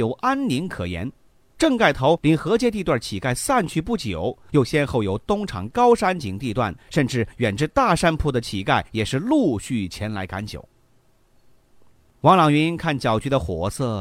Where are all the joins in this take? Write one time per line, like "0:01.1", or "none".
0:06.8